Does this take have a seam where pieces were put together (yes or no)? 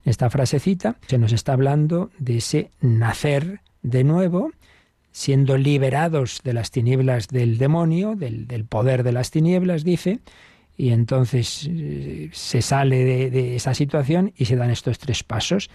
yes